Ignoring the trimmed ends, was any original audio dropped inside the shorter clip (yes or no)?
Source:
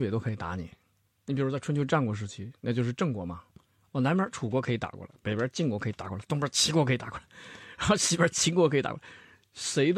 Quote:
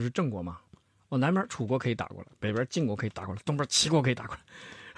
no